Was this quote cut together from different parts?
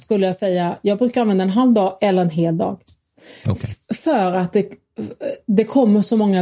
no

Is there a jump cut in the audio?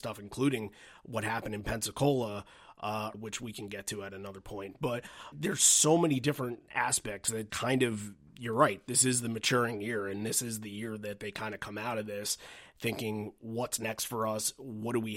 yes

